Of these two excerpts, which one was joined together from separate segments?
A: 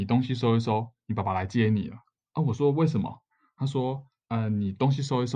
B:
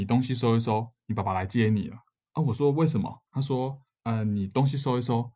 B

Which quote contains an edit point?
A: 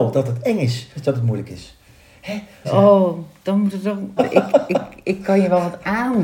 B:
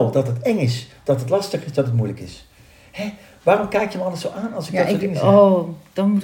A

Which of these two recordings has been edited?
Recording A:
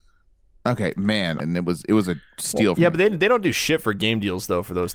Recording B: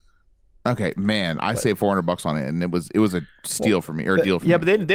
A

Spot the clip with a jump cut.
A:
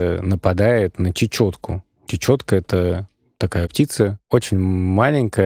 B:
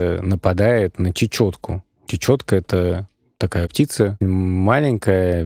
B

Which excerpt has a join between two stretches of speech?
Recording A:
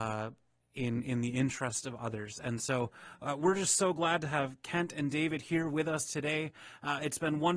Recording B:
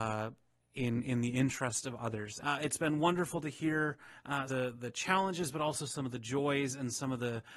B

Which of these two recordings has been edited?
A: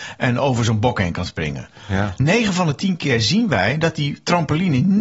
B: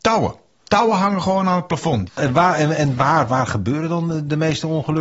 B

